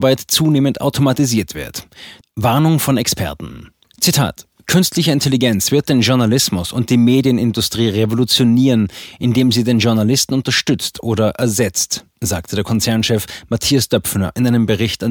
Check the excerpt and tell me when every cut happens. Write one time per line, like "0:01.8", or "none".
0:02.2
0:03.8